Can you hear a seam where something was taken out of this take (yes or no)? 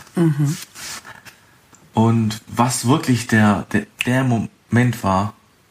no